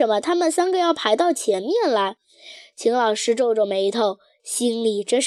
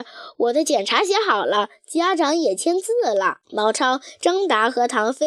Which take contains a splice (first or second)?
second